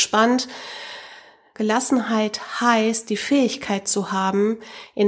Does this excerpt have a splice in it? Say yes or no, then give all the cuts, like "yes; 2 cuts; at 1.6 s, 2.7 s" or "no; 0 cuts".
yes; 1 cut; at 1.5 s